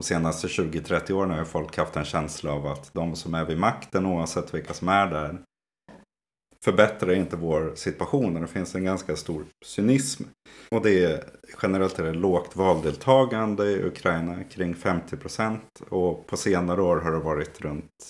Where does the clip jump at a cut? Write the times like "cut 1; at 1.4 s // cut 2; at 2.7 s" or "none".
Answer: cut 1; at 10.7 s

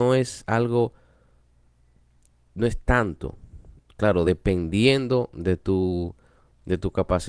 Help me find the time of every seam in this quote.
none

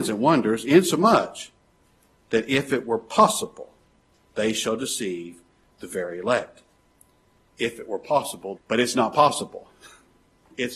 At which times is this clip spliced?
cut 1; at 8.6 s

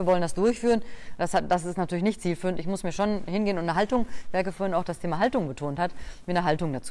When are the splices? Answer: none

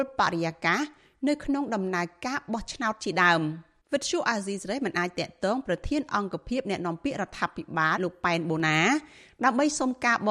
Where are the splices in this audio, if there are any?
cut 1; at 3.8 s // cut 2; at 8.0 s

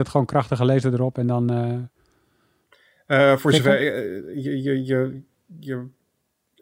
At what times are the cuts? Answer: none

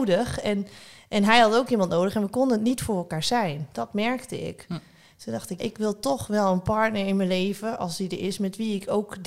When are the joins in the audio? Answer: cut 1; at 5.6 s

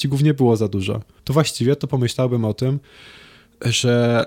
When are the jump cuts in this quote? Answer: cut 1; at 1.2 s

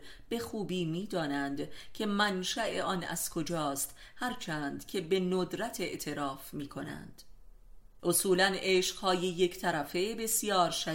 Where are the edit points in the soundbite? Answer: cut 1; at 8.0 s

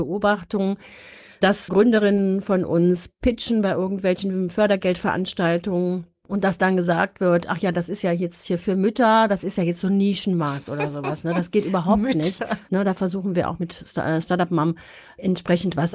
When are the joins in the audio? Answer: cut 1; at 1.7 s // cut 2; at 12.7 s

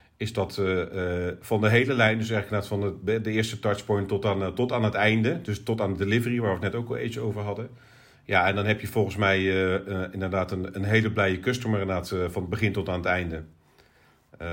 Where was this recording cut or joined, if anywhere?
cut 1; at 8.1 s

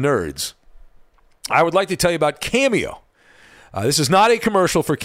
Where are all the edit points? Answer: none

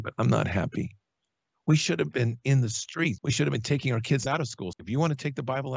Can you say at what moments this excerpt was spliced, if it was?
cut 1; at 3.2 s // cut 2; at 4.7 s

